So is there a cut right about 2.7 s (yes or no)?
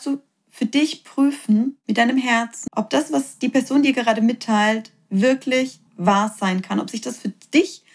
yes